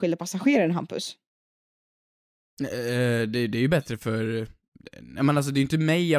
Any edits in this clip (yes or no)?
no